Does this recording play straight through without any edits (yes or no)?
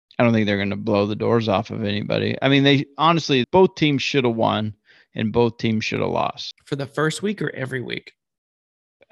no